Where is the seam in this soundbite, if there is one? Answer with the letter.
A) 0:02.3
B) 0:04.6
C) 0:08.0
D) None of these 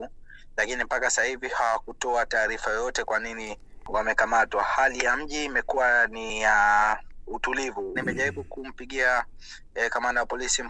C